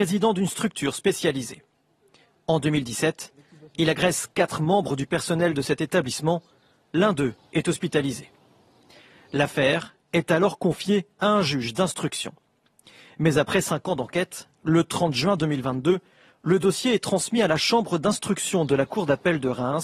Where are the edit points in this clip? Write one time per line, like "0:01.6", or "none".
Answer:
none